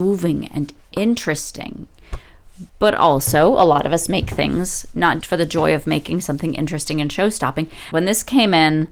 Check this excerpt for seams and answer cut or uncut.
cut